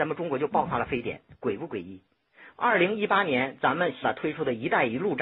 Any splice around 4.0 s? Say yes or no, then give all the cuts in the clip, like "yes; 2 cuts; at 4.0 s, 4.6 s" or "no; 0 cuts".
yes; 1 cut; at 4.0 s